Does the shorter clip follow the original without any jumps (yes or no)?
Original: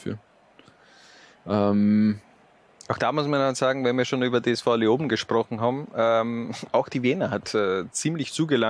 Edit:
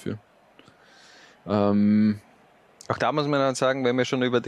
yes